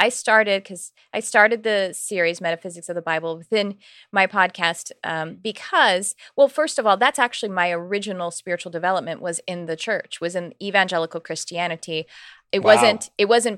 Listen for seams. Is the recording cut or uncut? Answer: uncut